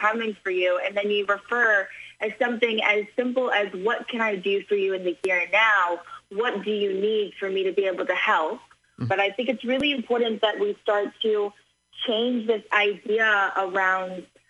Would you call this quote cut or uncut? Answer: cut